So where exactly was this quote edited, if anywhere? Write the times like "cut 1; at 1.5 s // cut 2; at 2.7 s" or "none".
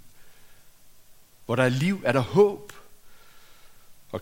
none